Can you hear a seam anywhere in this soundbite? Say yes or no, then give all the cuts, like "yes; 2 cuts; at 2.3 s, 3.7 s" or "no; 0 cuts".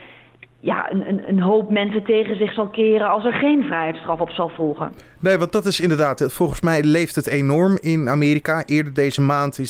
no; 0 cuts